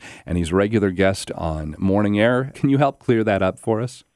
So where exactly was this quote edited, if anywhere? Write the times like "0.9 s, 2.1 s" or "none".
2.5 s